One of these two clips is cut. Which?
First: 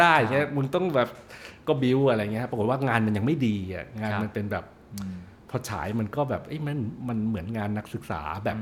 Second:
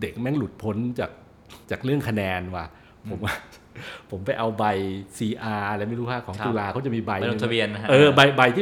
second; 1 cut; at 1.6 s

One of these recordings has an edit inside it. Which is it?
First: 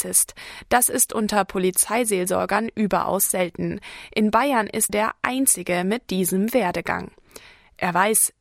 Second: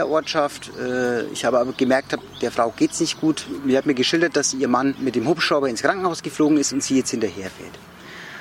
first; 1 cut; at 4.9 s

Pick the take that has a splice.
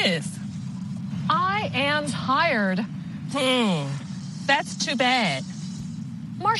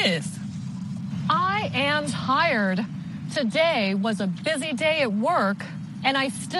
first; 1 cut; at 3.3 s

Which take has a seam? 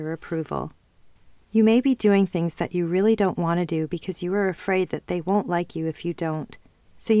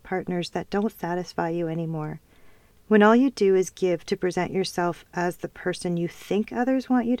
second; 1 cut; at 2.8 s

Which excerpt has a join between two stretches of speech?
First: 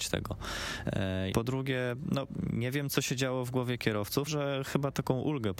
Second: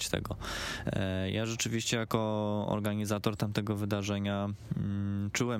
first; 2 cuts; at 1.3 s, 4.3 s

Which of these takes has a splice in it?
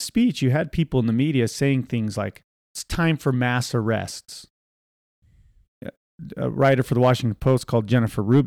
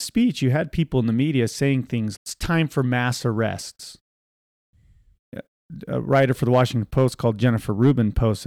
second; 1 cut; at 2.1 s

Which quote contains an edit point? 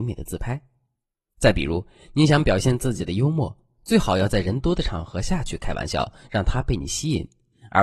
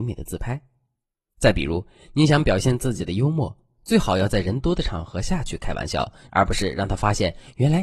second; 1 cut; at 6.3 s

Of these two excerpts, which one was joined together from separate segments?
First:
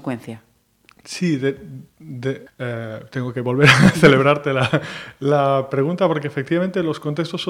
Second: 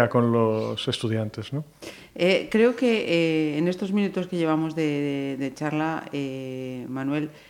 first; 1 cut; at 2.5 s

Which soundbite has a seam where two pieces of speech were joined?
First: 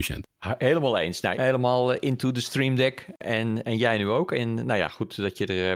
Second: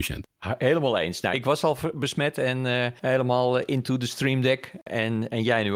first; 1 cut; at 1.3 s

